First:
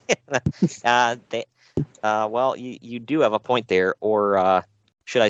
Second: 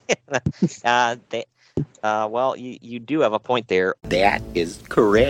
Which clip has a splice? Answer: second; 1 cut; at 4.0 s

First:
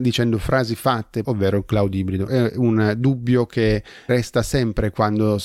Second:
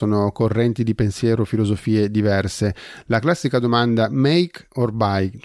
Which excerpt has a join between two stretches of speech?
first; 3 cuts; at 1.2 s, 2.3 s, 4.1 s

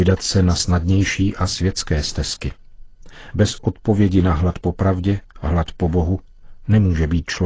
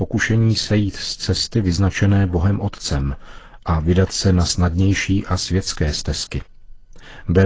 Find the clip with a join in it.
first; 1 cut; at 3.3 s

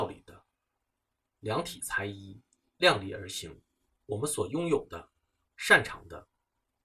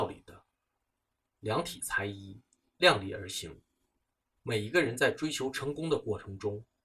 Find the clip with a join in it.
first; 1 cut; at 3.9 s

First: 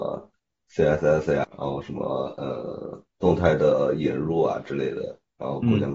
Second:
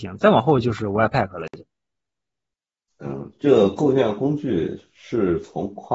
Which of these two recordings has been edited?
first; 2 cuts; at 1.5 s, 3.1 s

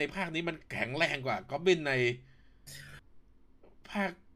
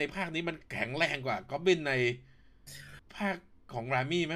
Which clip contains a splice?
second; 1 cut; at 3.0 s

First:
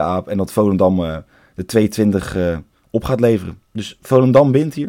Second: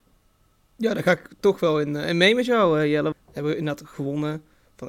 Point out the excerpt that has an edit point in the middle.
second; 1 cut; at 3.1 s

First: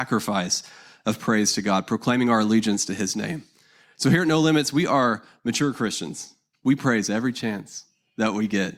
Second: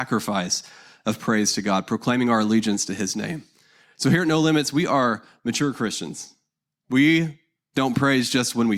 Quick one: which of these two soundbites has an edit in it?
first; 1 cut; at 6.5 s

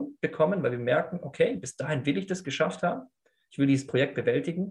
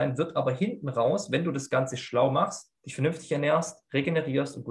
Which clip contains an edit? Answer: second; 1 cut; at 2.8 s

